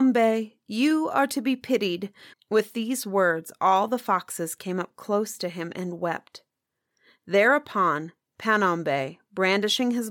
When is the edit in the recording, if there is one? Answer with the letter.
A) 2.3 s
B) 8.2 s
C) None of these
A